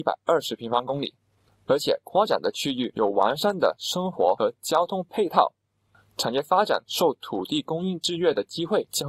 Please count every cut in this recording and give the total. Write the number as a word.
zero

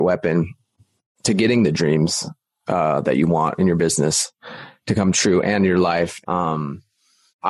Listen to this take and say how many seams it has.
one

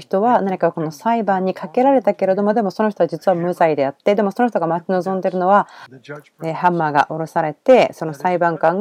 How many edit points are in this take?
zero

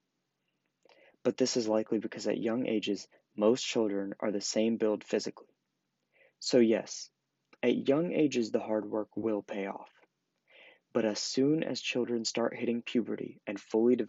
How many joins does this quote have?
zero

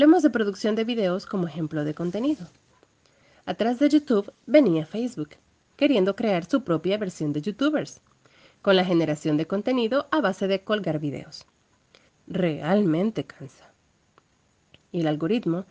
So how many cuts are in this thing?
one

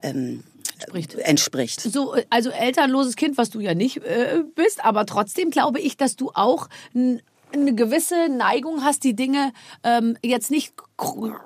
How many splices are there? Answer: one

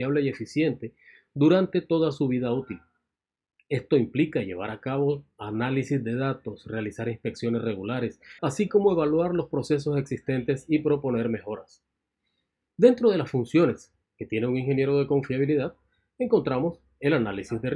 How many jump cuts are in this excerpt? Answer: one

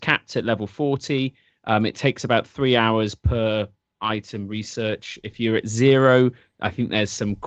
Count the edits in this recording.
zero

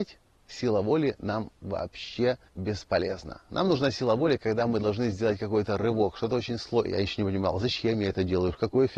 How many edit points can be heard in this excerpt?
two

